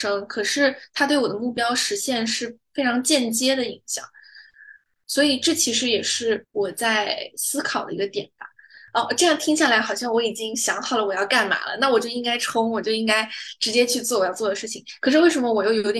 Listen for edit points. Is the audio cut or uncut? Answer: uncut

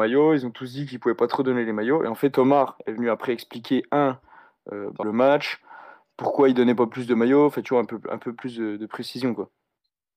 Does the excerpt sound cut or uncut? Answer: cut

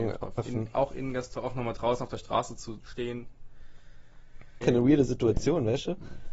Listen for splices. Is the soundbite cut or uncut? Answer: cut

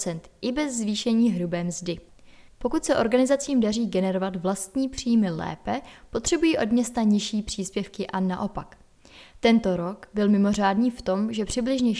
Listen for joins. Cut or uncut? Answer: cut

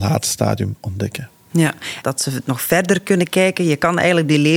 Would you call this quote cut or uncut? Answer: cut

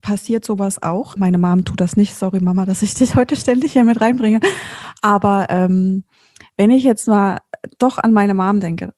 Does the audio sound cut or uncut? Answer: cut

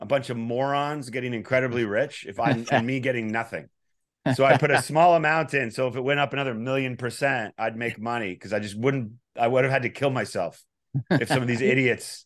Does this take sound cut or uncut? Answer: uncut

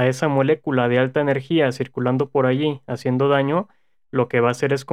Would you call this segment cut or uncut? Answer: uncut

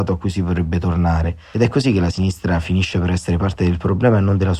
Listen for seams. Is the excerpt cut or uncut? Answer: uncut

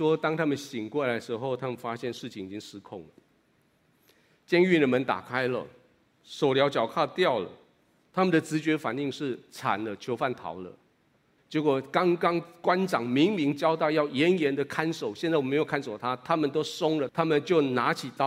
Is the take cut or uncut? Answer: cut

